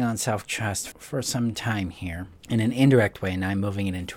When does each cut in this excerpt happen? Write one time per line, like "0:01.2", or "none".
0:00.9
0:02.4